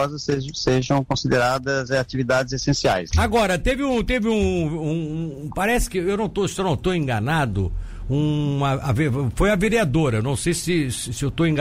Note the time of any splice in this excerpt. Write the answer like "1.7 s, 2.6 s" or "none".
3.1 s